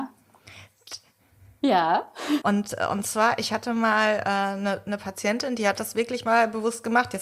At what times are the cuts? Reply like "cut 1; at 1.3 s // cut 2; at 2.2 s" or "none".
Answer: cut 1; at 2.4 s